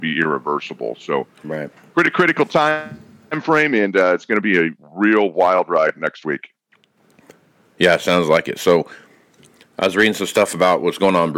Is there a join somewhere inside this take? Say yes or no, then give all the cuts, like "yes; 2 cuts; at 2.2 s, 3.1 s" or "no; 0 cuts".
no; 0 cuts